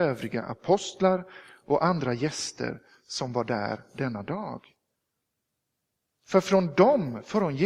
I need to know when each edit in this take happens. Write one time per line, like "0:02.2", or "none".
none